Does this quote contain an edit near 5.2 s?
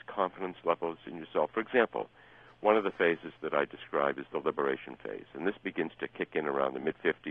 no; 0 cuts

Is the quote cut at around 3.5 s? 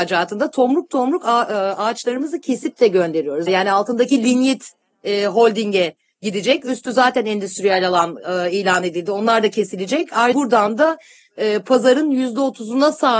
yes; 2 cuts; at 3.5 s, 10.3 s

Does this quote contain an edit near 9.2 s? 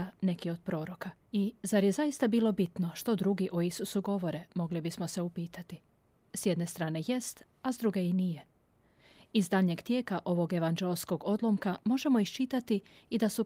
no; 1 cut; at 1.3 s

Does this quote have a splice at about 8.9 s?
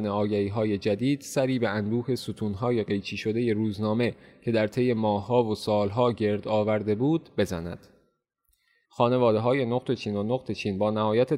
yes; 1 cut; at 8.9 s

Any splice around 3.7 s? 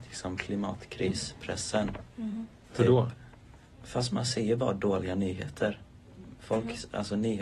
yes; 1 cut; at 3.7 s

